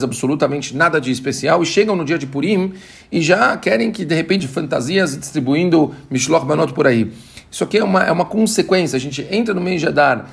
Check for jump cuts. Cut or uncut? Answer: cut